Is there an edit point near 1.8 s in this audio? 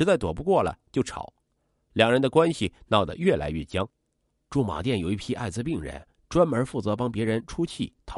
no; 1 cut; at 4.5 s

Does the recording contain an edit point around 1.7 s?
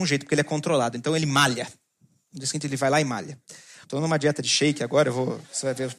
no; 1 cut; at 3.8 s

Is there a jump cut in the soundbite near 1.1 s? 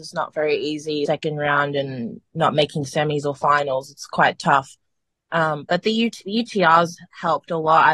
yes; 1 cut; at 1.1 s

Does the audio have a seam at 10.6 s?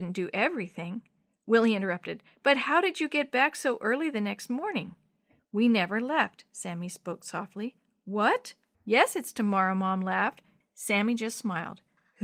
yes; 2 cuts; at 8.7 s, 10.6 s

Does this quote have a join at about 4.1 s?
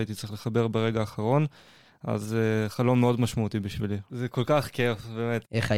yes; 1 cut; at 4.1 s

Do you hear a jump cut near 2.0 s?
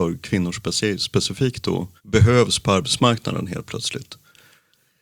yes; 1 cut; at 2.0 s

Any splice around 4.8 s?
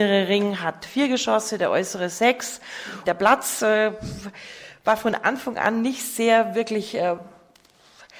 no; 1 cut; at 3.0 s

